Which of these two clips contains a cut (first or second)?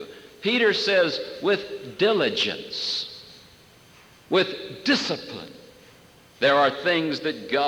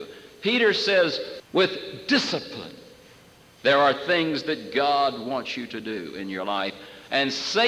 second